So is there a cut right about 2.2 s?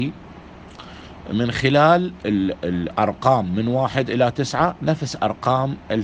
yes; 1 cut; at 2.2 s

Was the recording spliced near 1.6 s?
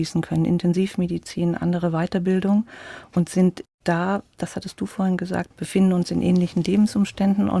no; 2 cuts; at 3.7 s, 5.5 s

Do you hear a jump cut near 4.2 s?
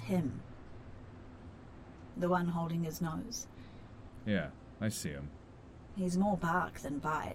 yes; 3 cuts; at 2.1 s, 4.2 s, 5.9 s

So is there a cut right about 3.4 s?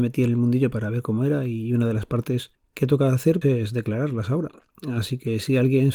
yes; 1 cut; at 3.4 s

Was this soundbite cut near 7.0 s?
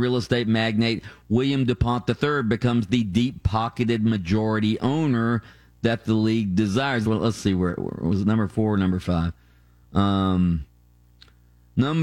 yes; 1 cut; at 7.0 s

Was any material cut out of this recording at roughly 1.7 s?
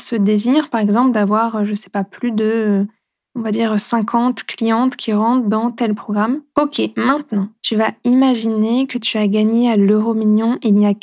no; 2 cuts; at 6.5 s, 7.6 s

